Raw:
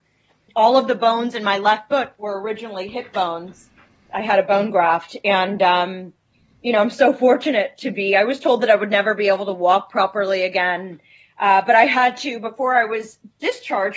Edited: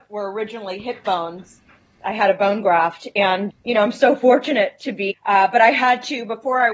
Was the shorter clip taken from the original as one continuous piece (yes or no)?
no